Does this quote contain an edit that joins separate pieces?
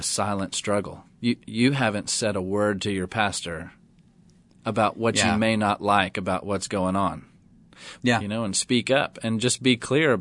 yes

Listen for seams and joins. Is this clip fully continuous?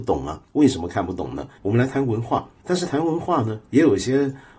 no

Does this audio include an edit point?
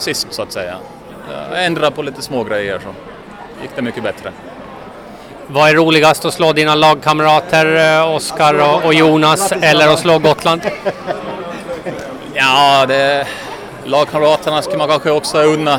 no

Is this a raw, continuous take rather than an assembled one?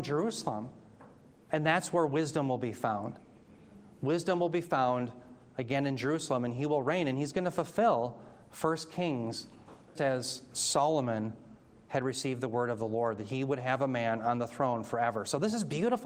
no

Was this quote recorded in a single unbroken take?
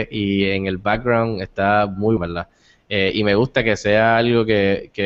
no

